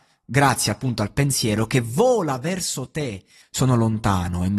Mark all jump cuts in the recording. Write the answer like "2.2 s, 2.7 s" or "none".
3.4 s